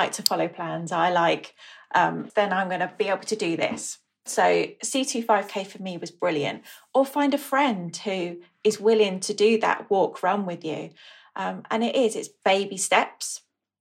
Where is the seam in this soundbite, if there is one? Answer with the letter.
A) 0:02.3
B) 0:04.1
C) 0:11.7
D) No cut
A